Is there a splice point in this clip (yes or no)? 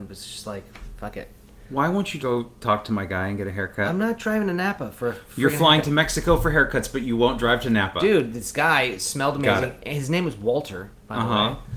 yes